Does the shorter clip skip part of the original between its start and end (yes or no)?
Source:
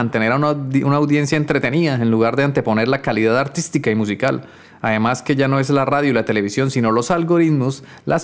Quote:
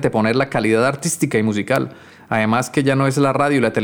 no